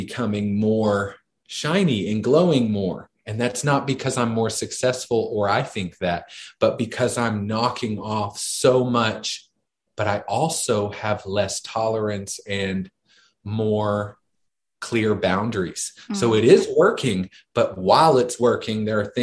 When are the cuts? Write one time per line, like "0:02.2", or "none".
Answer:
0:09.9